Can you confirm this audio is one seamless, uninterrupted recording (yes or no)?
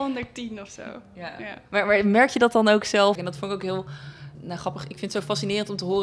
no